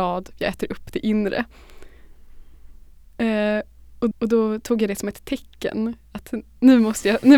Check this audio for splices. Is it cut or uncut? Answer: cut